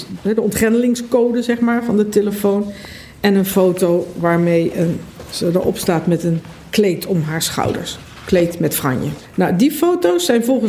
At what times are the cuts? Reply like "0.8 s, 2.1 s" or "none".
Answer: none